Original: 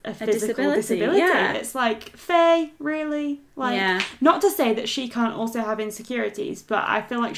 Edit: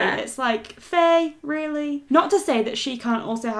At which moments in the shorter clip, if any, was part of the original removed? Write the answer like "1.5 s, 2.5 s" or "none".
2.1 s